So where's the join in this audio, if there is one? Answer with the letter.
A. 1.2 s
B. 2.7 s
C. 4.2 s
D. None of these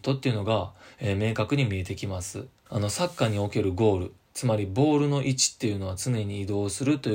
B